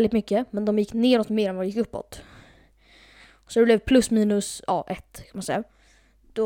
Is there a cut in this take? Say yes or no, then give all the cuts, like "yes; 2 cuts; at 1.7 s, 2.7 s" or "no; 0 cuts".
no; 0 cuts